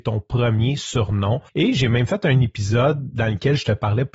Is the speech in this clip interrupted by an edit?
yes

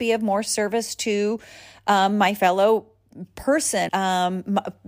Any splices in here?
yes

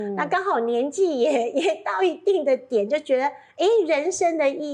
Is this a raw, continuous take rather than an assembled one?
yes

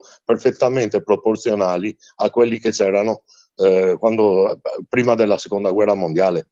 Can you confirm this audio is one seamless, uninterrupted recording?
yes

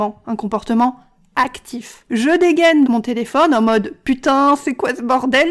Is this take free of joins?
no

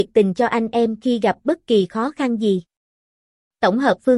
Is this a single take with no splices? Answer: yes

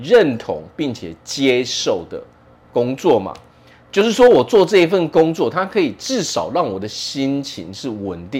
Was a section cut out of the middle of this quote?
no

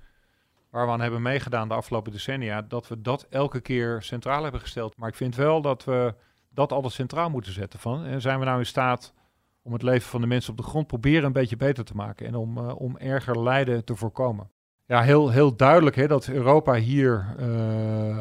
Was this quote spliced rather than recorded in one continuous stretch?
yes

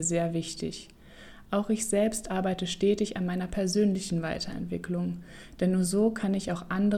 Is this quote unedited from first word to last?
yes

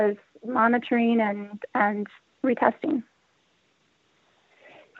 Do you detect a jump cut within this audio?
yes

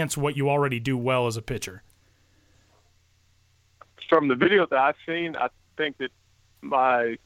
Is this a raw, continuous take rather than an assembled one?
yes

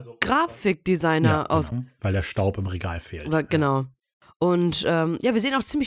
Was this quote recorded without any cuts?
no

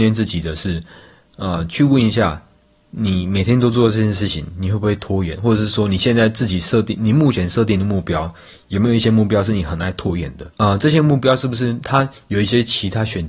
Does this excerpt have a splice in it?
yes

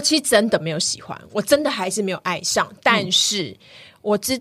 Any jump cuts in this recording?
no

